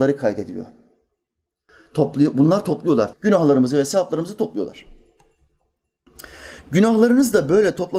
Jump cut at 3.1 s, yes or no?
yes